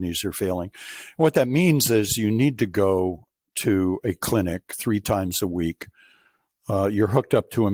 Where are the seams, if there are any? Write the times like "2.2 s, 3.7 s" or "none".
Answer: none